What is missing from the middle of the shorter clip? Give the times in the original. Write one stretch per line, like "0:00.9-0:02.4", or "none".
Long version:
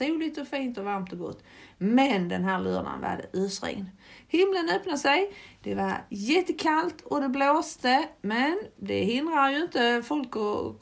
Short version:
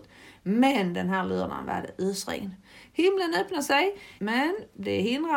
0:05.5-0:08.2